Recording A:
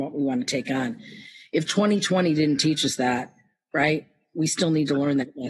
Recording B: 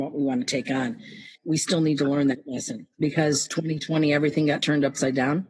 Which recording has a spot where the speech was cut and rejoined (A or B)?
B